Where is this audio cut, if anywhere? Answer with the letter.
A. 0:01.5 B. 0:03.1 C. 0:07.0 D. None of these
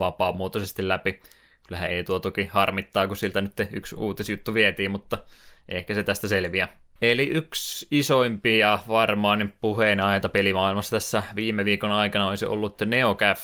C